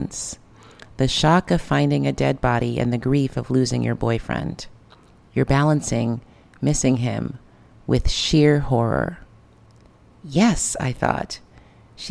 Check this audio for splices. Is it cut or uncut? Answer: uncut